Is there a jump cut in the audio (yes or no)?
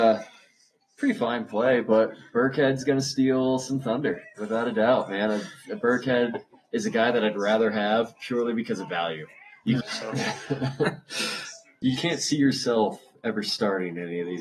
yes